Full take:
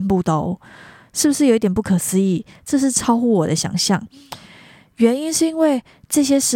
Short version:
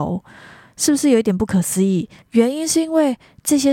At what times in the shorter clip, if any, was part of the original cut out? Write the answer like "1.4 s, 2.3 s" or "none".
2.2 s